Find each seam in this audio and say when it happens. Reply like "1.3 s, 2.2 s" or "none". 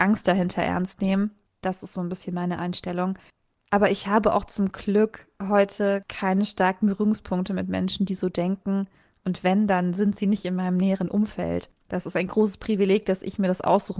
1.6 s